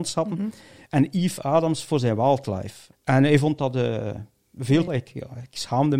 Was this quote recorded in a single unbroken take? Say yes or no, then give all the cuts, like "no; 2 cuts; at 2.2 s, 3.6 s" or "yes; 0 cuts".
no; 2 cuts; at 2.9 s, 4.9 s